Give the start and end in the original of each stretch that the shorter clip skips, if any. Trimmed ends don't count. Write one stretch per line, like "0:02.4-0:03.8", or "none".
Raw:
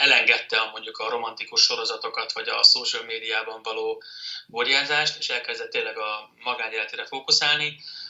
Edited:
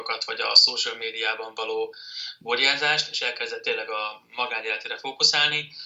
none